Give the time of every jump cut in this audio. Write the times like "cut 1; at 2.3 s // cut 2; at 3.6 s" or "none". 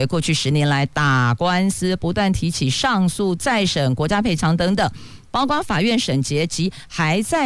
none